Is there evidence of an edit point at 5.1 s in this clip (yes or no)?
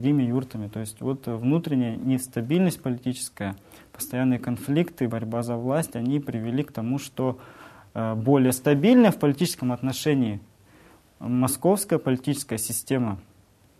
no